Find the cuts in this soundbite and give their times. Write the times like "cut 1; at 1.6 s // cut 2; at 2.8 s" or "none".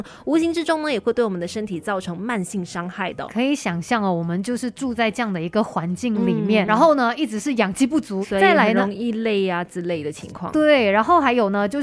cut 1; at 6.7 s // cut 2; at 8.2 s